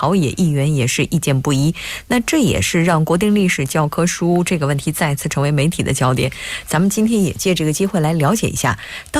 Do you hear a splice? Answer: no; 0 cuts

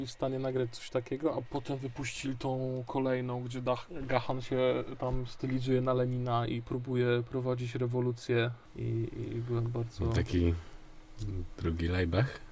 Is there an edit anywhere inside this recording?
yes; 1 cut; at 1.4 s

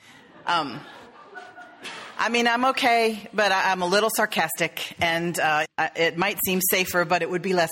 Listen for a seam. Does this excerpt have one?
yes; 1 cut; at 5.6 s

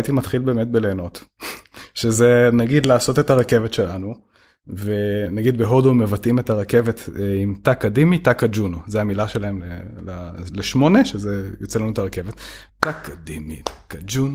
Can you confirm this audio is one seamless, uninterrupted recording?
no; 1 cut; at 12.7 s

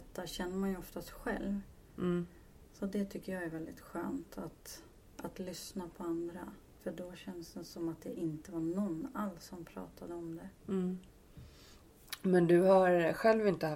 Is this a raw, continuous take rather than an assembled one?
no; 2 cuts; at 6.7 s, 10.6 s

